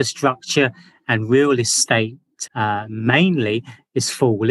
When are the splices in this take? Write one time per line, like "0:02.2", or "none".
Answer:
0:02.5